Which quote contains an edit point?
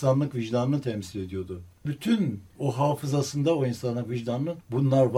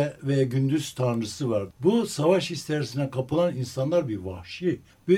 second; 1 cut; at 1.7 s

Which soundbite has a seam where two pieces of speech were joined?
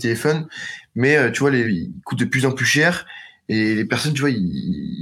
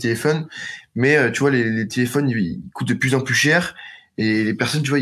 first; 1 cut; at 1.6 s

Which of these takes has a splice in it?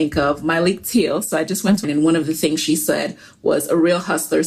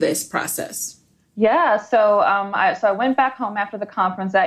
first; 1 cut; at 1.8 s

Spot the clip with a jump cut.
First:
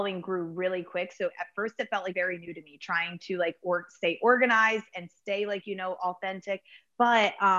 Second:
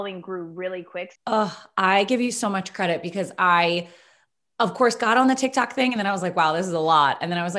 second; 1 cut; at 1.2 s

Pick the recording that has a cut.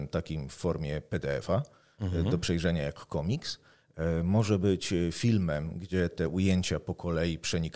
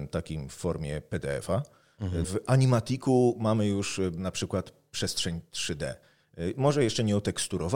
second; 1 cut; at 2.2 s

